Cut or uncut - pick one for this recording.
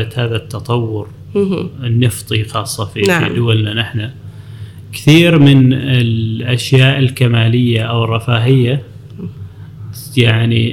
uncut